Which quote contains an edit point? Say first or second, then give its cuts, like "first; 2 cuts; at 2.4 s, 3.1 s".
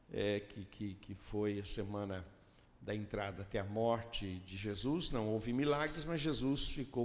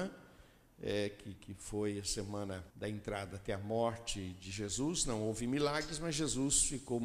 second; 2 cuts; at 1.4 s, 2.7 s